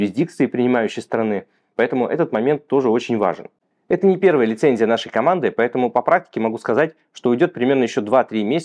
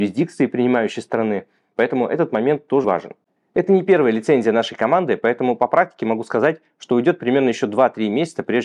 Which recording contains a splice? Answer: second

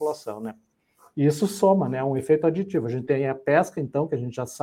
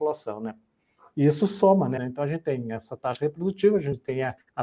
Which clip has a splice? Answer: second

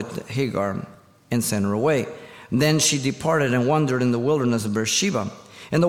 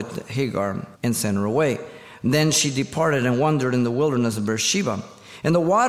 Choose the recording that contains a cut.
second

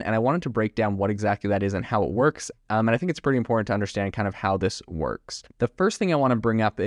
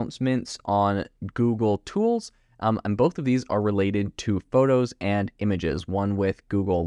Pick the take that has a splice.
first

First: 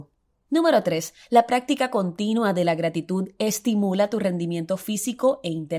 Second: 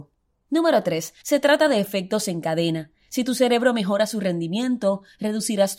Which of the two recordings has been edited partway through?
second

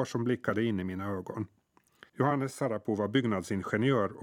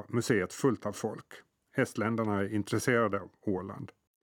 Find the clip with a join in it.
first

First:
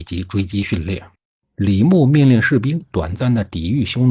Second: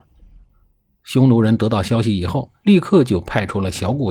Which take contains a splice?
first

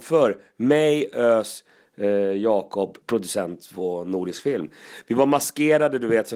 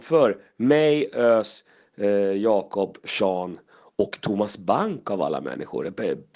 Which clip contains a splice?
first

